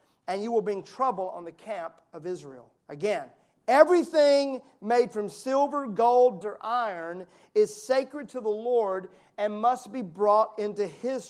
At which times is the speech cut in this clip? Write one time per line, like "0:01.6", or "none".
0:02.8
0:06.4